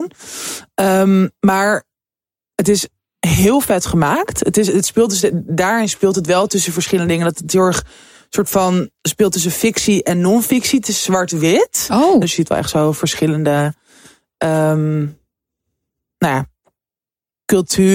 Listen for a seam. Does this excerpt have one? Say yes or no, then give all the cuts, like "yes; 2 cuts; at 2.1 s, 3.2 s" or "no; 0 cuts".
yes; 1 cut; at 12.2 s